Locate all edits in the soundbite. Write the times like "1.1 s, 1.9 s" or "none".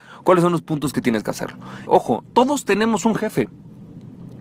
1.9 s

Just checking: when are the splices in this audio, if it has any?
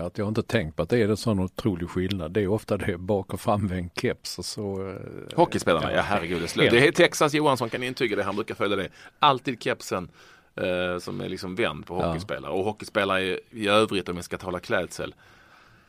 none

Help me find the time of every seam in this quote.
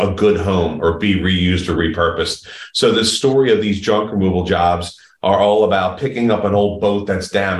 none

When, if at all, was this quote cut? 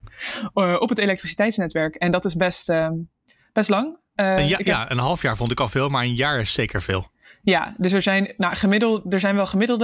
none

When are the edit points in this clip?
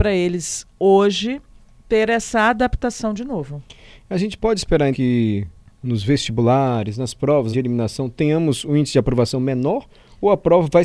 4.9 s, 7.5 s

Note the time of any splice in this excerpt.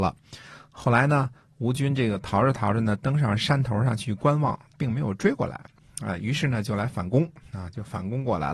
4.7 s

